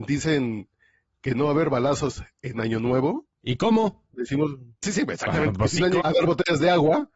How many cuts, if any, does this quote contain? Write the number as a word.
two